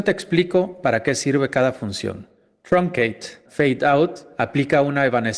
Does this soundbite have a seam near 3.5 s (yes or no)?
yes